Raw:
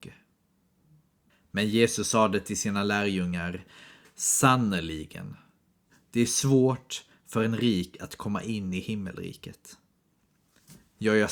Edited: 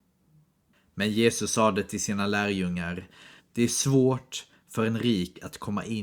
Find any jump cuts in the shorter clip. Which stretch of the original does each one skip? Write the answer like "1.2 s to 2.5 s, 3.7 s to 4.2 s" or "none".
4.0 s to 6.0 s